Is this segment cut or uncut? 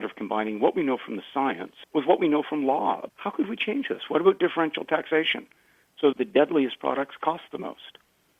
uncut